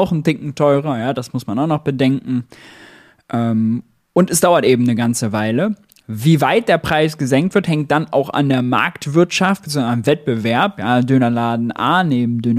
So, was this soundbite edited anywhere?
no; 0 cuts

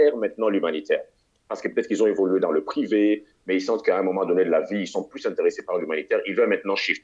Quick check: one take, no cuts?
yes; 0 cuts

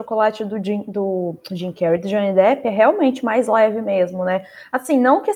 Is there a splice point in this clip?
no; 0 cuts

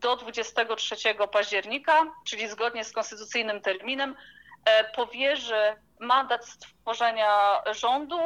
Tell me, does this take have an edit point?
no; 0 cuts

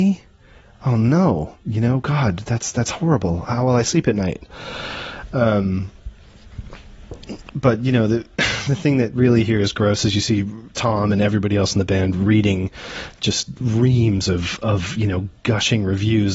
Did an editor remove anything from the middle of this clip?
no; 0 cuts

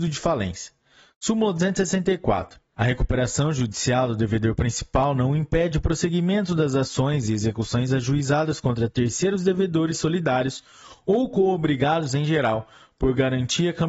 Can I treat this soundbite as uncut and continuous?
no; 1 cut; at 2.7 s

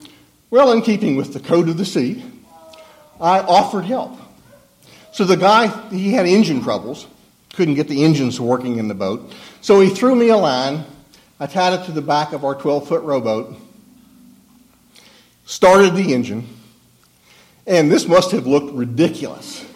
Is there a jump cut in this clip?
no; 0 cuts

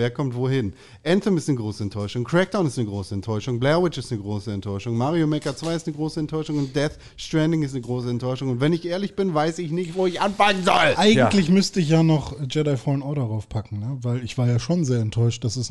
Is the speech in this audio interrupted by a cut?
no; 0 cuts

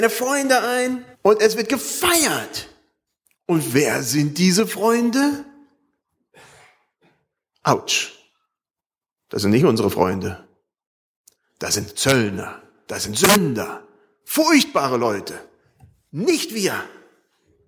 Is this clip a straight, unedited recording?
no; 1 cut; at 1.1 s

